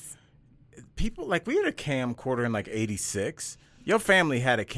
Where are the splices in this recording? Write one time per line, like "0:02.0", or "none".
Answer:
none